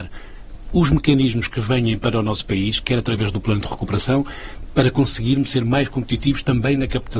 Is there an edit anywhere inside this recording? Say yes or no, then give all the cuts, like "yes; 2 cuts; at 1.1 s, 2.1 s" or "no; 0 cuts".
yes; 1 cut; at 2.8 s